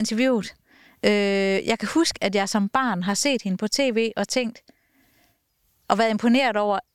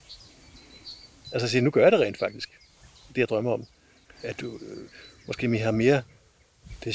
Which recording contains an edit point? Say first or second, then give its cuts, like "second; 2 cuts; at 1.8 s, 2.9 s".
second; 1 cut; at 4.0 s